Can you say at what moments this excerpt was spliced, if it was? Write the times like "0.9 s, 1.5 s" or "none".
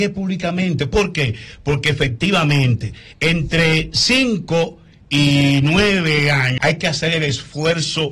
6.6 s